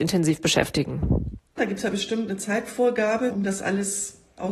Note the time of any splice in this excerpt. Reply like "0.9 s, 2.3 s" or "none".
1.6 s, 3.3 s